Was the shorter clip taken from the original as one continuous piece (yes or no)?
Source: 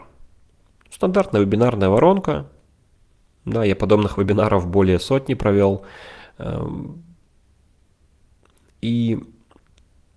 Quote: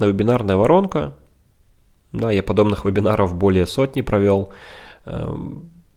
yes